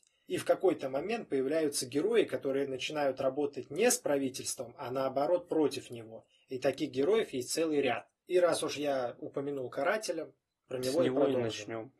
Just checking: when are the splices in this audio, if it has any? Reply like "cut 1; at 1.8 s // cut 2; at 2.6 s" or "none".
none